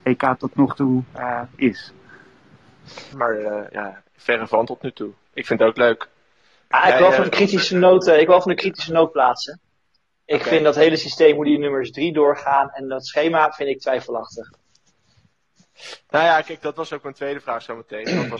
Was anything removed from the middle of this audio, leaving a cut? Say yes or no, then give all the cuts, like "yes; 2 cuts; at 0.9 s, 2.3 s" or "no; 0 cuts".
yes; 1 cut; at 3.1 s